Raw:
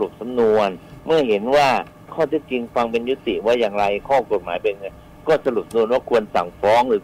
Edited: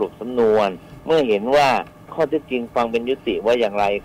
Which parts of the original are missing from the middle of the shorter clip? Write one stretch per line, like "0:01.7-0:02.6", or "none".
none